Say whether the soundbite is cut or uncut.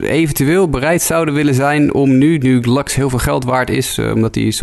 uncut